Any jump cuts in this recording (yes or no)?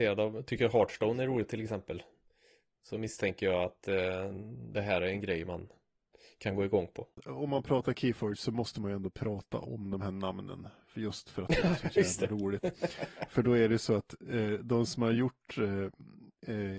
no